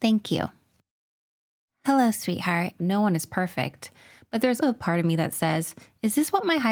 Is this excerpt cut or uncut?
cut